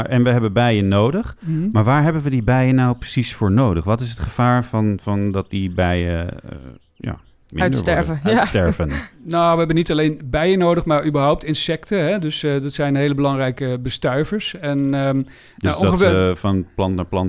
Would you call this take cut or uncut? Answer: uncut